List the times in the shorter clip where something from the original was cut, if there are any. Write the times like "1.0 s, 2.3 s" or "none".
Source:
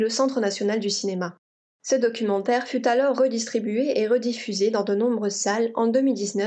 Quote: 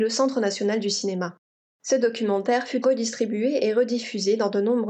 2.8 s